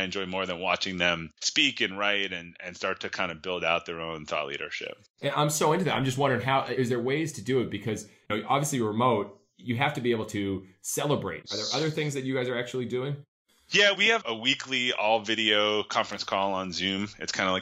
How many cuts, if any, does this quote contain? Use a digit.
1